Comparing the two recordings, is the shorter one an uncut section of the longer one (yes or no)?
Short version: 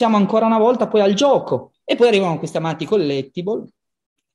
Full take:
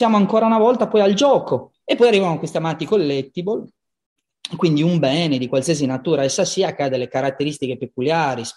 yes